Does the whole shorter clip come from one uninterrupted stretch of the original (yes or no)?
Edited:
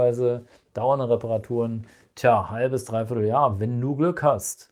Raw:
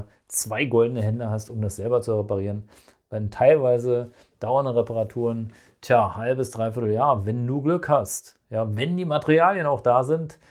yes